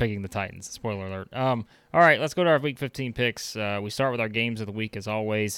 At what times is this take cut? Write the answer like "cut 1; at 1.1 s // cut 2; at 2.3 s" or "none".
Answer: none